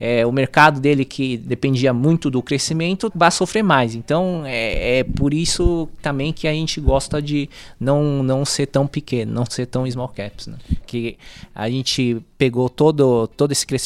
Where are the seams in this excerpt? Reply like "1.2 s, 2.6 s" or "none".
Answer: 3.1 s, 10.8 s

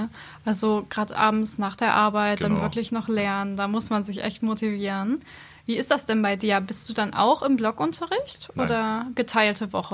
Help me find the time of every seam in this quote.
none

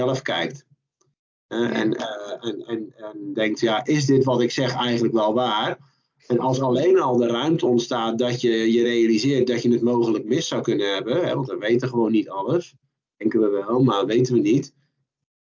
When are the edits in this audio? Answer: none

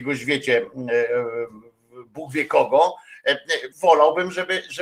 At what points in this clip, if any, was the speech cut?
3.7 s

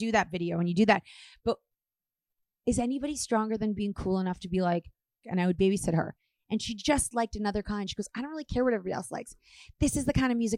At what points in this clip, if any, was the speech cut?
3.7 s, 5.2 s

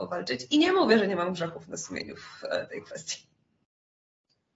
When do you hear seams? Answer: none

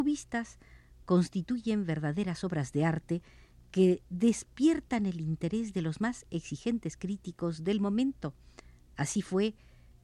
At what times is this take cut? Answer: none

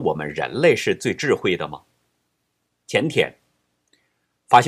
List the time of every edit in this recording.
2.7 s

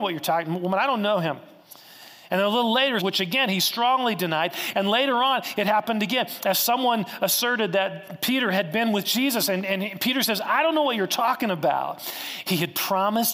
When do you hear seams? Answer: 3.0 s, 12.4 s

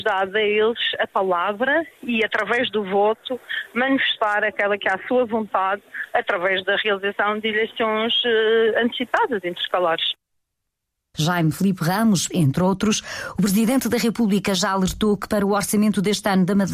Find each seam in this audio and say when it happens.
11.1 s, 12.3 s

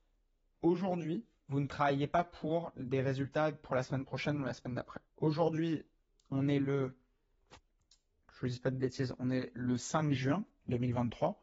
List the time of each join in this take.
5.1 s

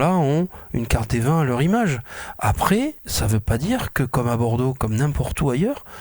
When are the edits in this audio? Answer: 3.0 s, 4.8 s

